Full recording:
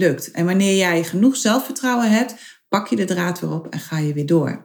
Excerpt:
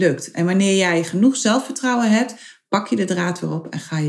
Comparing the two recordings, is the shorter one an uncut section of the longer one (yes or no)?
yes